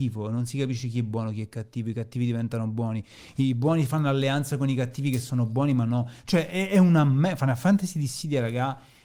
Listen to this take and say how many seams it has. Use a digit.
0